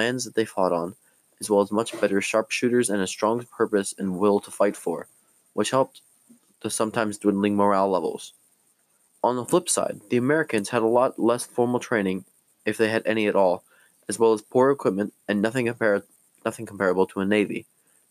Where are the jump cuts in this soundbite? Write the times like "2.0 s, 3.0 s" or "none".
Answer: none